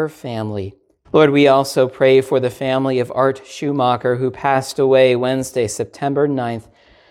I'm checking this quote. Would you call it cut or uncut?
cut